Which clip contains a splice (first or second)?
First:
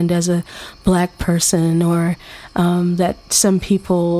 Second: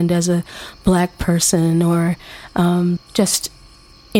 second